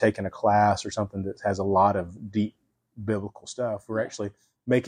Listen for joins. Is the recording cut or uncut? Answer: uncut